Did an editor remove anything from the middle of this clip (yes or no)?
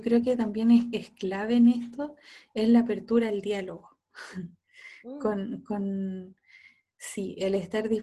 no